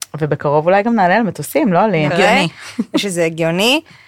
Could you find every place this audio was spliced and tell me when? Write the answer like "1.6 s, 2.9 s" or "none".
2.1 s